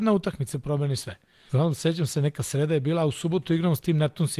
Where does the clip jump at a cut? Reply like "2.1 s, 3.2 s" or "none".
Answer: 1.5 s